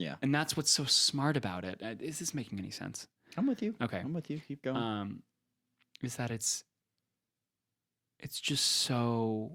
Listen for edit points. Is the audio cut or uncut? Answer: uncut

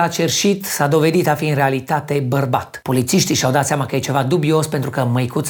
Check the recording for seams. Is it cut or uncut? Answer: uncut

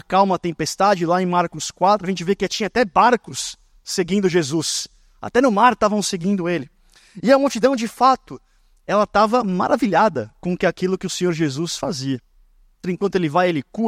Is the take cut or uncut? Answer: cut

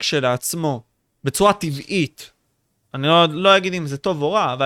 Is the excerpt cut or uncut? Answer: uncut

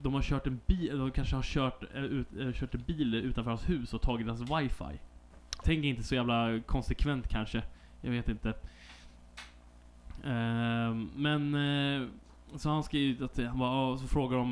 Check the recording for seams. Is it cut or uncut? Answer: cut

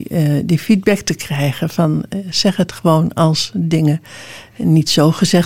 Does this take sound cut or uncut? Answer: cut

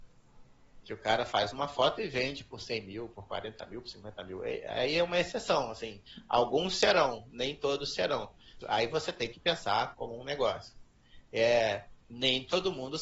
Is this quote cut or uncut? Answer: cut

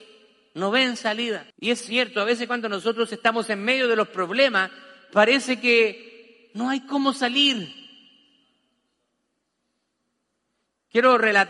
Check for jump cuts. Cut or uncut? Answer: cut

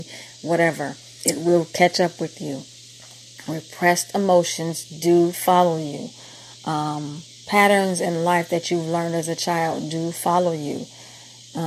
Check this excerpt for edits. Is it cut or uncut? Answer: uncut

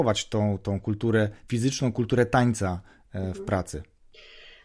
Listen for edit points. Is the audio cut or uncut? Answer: uncut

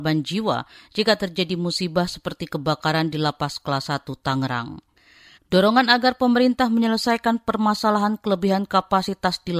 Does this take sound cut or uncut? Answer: cut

